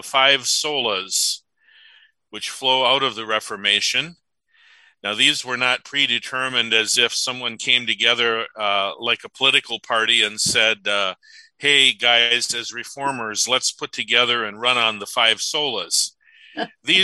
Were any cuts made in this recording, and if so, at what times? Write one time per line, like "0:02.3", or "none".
none